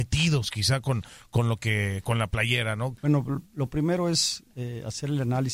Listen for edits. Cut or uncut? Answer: cut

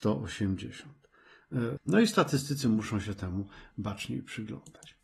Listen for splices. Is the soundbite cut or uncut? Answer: cut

